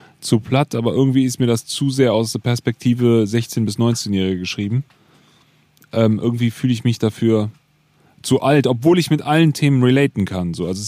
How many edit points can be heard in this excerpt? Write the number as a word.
zero